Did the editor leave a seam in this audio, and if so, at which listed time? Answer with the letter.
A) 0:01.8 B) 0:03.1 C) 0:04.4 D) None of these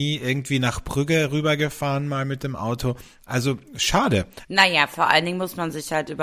C